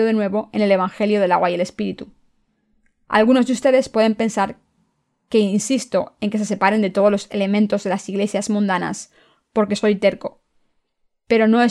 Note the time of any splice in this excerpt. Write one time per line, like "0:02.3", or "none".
none